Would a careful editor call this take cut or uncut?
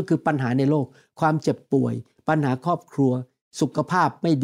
uncut